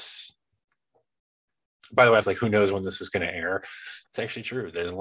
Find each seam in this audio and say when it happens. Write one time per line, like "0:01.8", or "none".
0:02.2
0:04.0